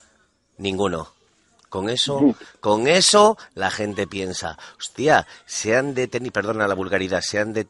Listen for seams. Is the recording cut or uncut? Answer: uncut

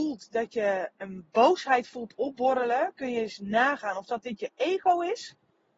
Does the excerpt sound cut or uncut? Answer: cut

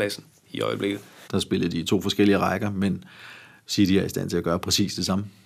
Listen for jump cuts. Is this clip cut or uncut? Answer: cut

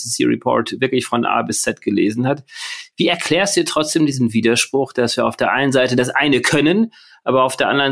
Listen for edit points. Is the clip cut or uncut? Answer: uncut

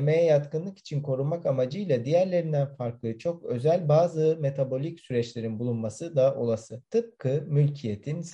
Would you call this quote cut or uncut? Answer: cut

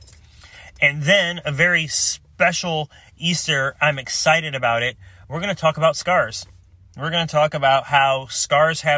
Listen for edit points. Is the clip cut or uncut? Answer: uncut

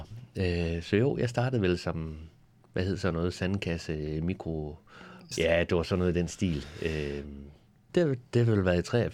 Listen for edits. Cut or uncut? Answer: cut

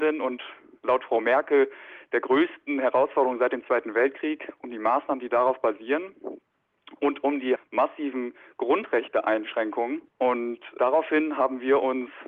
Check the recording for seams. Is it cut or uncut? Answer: cut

